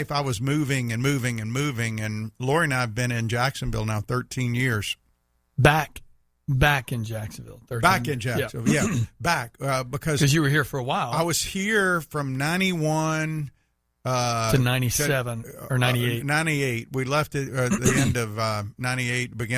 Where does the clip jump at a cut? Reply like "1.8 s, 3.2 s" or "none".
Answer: none